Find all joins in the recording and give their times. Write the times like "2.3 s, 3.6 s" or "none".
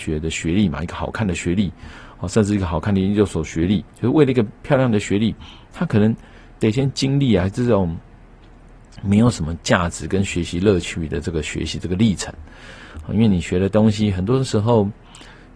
none